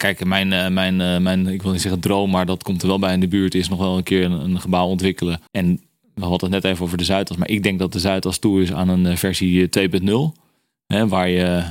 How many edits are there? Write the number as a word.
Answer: one